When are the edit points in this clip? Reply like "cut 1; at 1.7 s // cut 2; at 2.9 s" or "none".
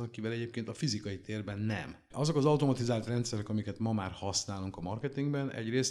cut 1; at 2.1 s

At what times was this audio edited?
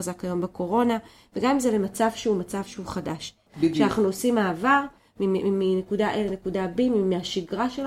cut 1; at 3.5 s

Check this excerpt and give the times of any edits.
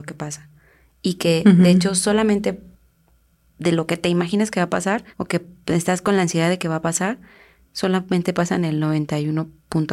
cut 1; at 5.1 s

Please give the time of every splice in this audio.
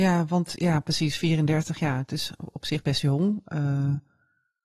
none

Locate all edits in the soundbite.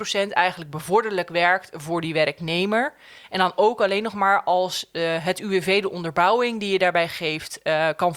none

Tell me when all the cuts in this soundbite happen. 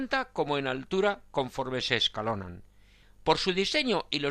cut 1; at 3.0 s

